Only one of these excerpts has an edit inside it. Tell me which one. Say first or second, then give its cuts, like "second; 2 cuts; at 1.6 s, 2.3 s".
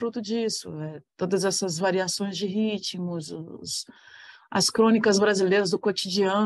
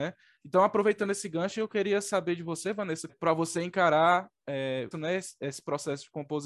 second; 2 cuts; at 3.1 s, 4.9 s